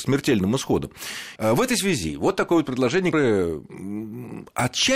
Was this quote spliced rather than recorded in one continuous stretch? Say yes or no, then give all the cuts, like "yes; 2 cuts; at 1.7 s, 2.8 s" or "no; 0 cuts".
yes; 2 cuts; at 1.4 s, 3.1 s